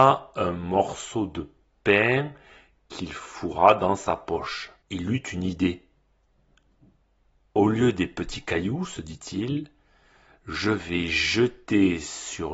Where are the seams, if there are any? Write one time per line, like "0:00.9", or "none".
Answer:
none